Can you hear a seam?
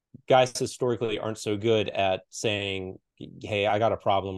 no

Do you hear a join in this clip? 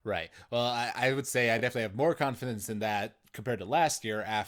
no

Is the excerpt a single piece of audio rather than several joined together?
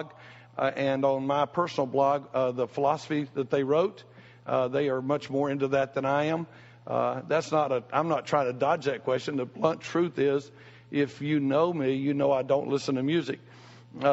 yes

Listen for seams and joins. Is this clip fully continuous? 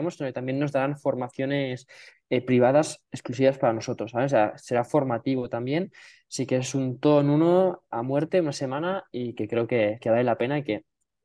yes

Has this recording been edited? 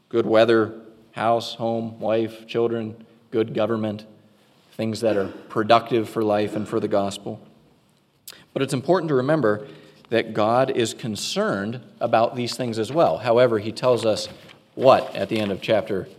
no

